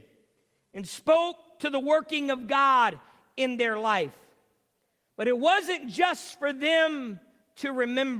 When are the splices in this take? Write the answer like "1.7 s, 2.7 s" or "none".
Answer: none